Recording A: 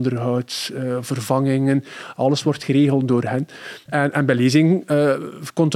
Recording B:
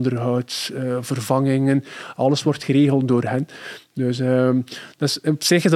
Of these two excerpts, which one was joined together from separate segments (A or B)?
A